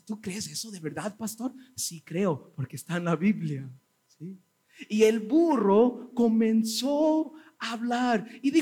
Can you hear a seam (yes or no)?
no